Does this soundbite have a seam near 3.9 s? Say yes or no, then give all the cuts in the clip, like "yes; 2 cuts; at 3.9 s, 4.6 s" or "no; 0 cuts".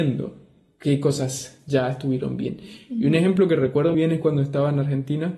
yes; 1 cut; at 3.9 s